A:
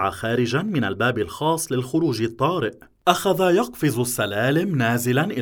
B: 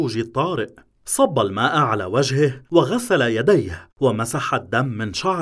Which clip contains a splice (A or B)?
B